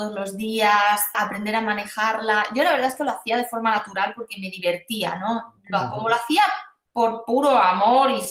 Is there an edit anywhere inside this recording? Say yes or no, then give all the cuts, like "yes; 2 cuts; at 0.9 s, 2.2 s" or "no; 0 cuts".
yes; 1 cut; at 1.1 s